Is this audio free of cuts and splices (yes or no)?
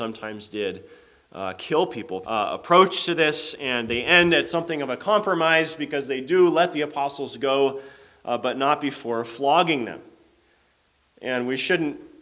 no